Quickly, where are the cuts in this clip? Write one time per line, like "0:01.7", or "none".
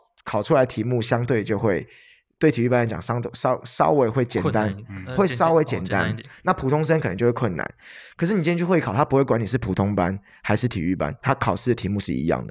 none